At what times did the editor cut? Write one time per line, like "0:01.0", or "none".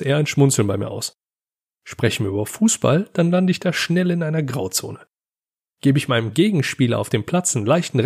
none